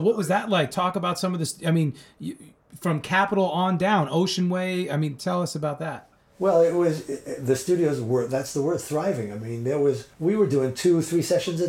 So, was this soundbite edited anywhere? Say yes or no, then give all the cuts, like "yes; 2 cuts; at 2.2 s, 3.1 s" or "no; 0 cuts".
yes; 1 cut; at 10.1 s